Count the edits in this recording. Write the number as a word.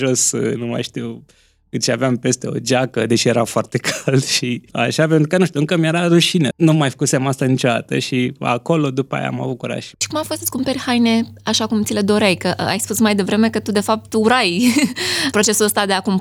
one